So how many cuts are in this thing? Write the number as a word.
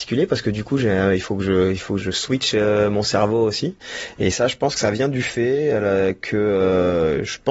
one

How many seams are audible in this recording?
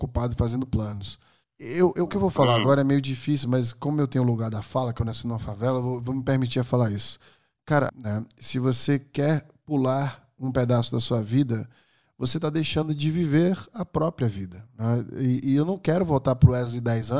one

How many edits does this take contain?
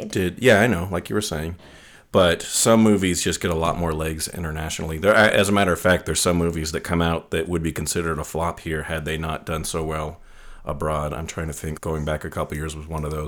one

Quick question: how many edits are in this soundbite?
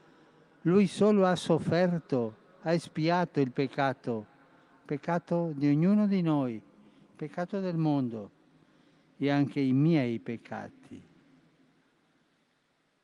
zero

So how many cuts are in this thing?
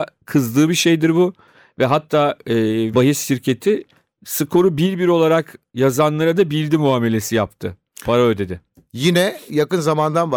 one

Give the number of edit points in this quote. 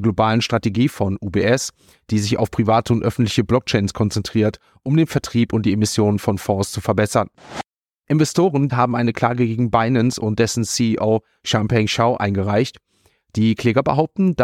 one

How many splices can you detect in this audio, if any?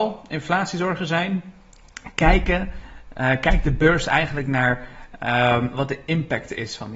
zero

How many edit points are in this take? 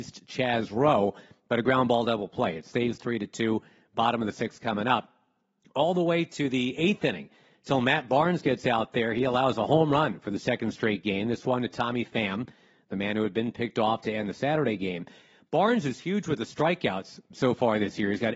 zero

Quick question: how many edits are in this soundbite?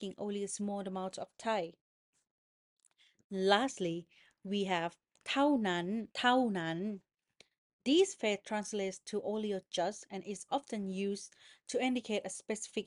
one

